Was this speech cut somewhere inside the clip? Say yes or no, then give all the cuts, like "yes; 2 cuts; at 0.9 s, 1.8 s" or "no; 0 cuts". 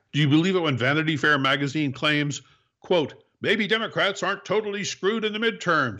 no; 0 cuts